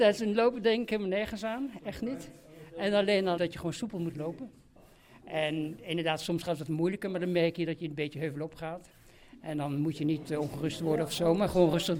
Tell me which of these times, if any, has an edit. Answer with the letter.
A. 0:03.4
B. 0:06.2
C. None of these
A